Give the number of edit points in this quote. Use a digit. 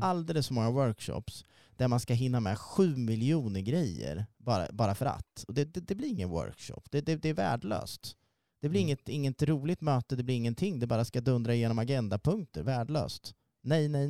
1